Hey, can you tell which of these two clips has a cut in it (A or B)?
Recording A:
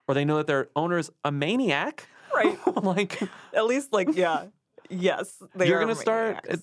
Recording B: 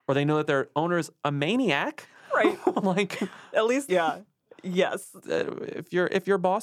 B